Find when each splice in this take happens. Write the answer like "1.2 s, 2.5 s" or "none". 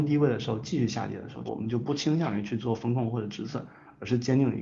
1.5 s